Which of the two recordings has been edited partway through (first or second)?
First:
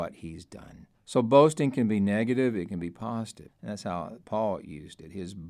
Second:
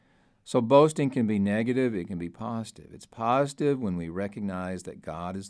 first